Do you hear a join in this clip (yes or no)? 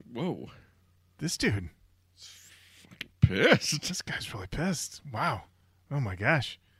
no